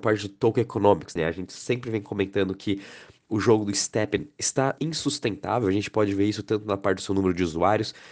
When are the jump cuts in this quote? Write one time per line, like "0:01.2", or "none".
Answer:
0:01.2
0:04.8

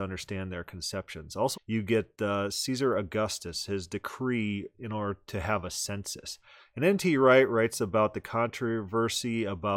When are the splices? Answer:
0:01.5

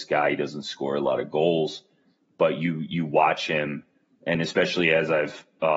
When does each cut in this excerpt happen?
none

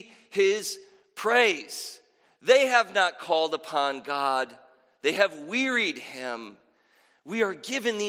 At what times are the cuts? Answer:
none

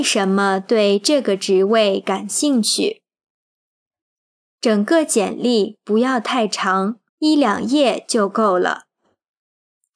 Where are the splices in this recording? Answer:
0:04.4
0:07.1

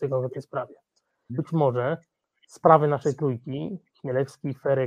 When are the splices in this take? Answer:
0:01.3

